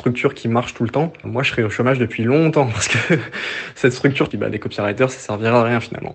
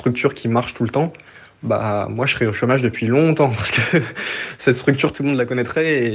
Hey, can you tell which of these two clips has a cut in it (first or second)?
first